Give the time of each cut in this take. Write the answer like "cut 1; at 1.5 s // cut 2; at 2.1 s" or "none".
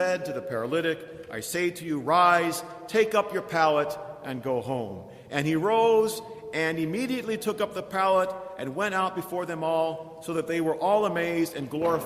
none